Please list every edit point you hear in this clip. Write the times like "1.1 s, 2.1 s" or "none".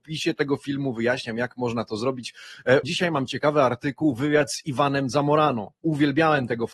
2.8 s